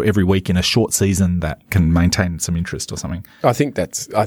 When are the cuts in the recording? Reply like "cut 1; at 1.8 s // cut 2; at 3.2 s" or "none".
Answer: cut 1; at 1.7 s